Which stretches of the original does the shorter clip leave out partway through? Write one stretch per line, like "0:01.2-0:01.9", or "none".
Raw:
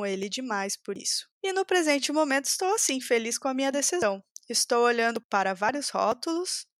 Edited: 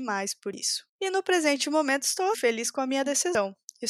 0:02.8-0:03.0